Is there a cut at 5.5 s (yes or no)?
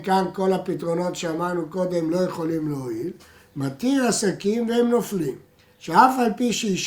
no